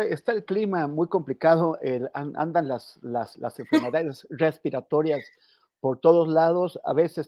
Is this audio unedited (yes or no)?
yes